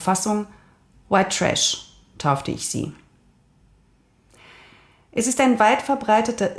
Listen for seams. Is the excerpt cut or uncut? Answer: uncut